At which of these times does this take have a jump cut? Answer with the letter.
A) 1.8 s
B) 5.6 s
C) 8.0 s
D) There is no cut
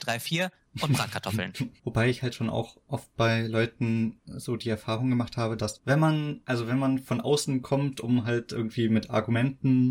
A